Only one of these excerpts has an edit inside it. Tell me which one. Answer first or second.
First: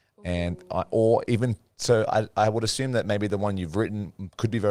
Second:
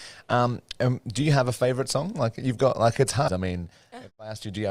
second